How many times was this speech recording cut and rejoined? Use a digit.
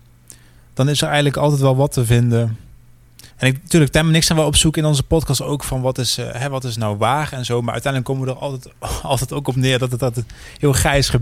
1